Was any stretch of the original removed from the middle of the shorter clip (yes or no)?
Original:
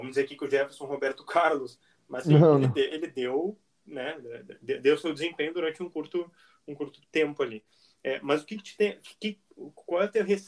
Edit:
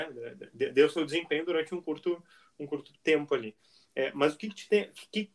no